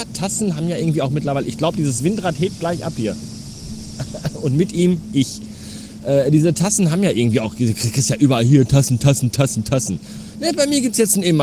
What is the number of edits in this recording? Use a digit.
0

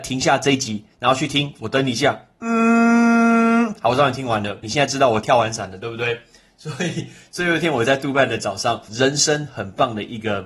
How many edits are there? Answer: 2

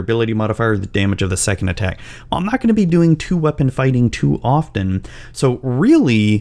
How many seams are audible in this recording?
0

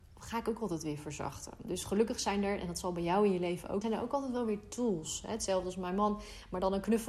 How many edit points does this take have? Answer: 1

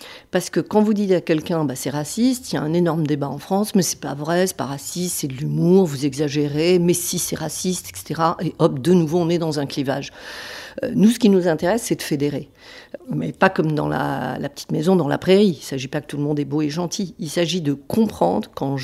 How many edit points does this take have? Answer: 1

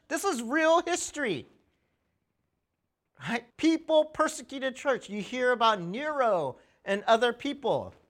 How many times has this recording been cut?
1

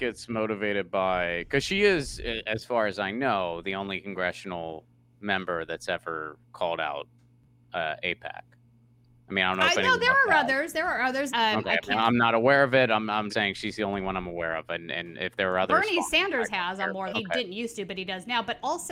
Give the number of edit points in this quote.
3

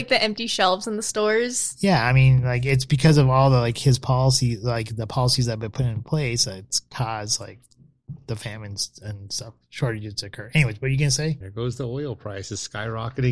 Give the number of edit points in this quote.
1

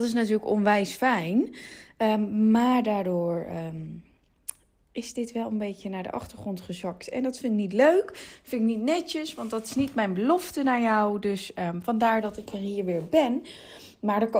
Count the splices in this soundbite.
0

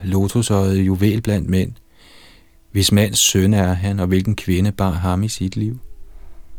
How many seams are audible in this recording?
0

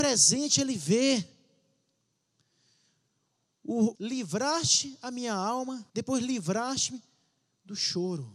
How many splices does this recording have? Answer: 2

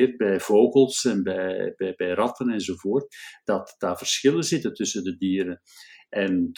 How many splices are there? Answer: 0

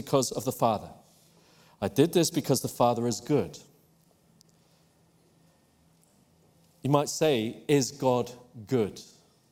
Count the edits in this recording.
0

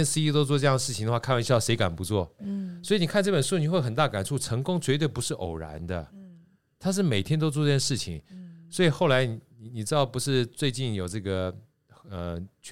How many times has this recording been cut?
1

